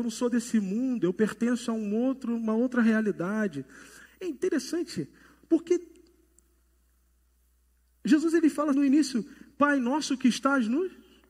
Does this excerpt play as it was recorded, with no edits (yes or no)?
no